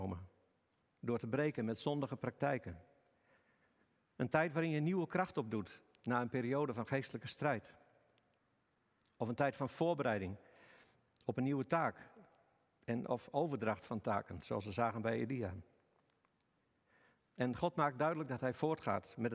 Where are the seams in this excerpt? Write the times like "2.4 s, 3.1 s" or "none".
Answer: 17.2 s

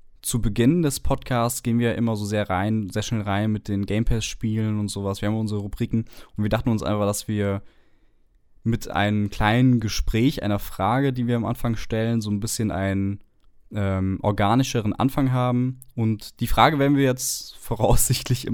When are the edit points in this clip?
none

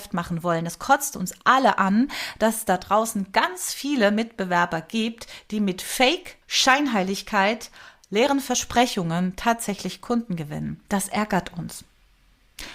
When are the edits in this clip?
6.4 s

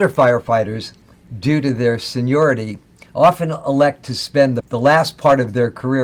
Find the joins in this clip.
4.6 s

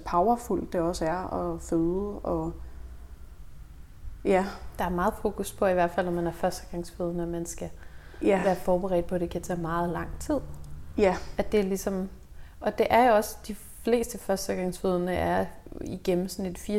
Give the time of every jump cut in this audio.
none

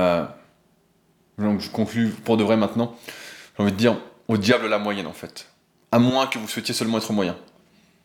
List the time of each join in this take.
none

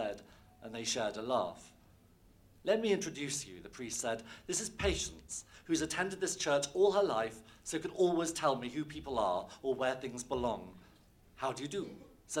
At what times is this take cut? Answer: none

